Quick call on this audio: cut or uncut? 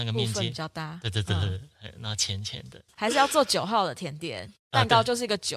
cut